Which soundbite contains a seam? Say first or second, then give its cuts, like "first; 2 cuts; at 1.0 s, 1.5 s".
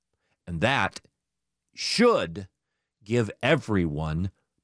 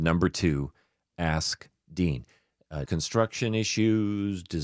second; 1 cut; at 2.9 s